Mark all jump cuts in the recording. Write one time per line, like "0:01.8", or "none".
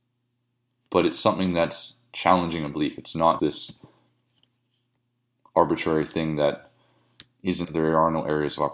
0:03.4
0:07.6